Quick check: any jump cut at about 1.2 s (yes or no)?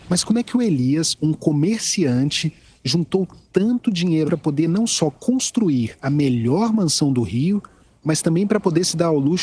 no